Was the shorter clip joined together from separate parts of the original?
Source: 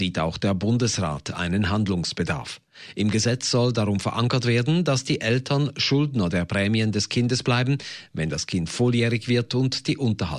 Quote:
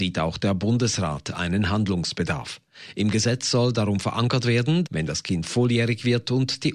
yes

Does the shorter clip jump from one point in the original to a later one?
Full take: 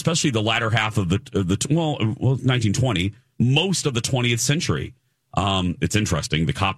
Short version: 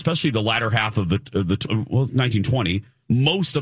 yes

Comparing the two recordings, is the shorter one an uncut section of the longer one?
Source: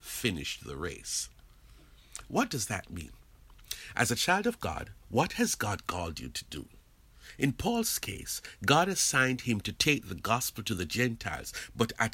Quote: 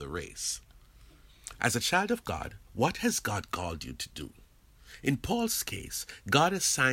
no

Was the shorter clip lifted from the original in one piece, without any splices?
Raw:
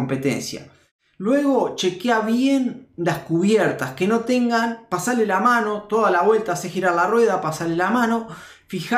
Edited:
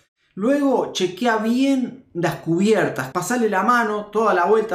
no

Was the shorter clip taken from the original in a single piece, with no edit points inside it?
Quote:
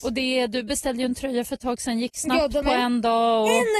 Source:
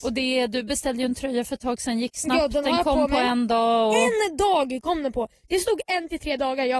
no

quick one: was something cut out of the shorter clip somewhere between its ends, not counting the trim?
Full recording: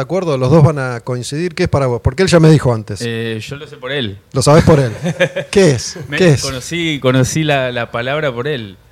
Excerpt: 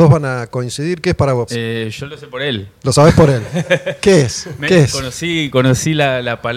yes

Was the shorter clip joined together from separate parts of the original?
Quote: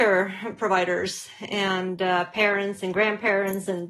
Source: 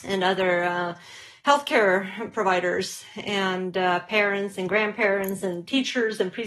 no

